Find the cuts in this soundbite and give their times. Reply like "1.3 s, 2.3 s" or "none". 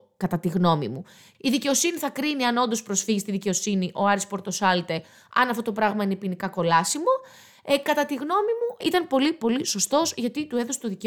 8.8 s